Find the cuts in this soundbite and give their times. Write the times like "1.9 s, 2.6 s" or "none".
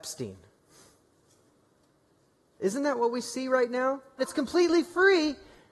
2.5 s, 4.2 s